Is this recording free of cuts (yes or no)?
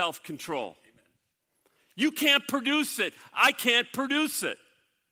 yes